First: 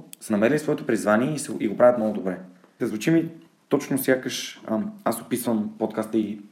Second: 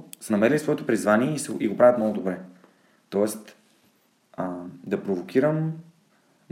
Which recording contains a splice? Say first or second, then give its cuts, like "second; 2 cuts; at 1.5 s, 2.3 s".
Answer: first; 1 cut; at 2.8 s